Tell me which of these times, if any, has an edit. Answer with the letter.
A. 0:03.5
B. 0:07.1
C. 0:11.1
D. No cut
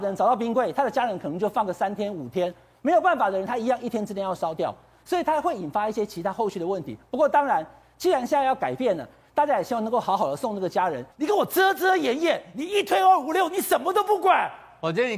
C